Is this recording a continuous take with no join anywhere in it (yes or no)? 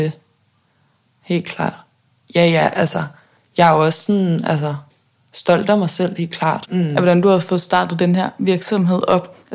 no